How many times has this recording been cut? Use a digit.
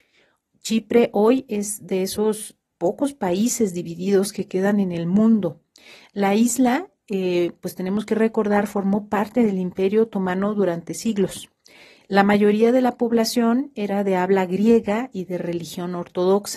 0